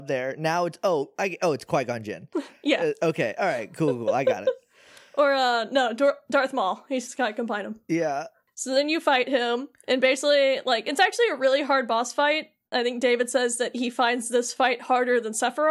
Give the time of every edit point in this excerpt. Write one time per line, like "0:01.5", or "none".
0:07.9